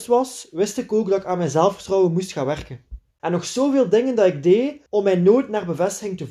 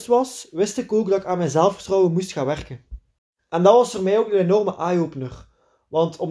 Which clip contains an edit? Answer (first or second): first